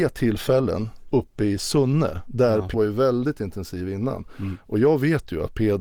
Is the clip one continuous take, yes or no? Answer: no